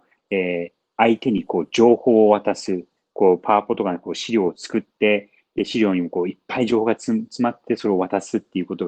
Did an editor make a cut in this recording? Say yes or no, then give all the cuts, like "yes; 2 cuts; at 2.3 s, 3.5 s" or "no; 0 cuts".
no; 0 cuts